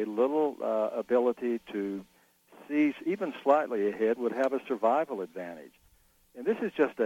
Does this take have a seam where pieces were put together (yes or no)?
no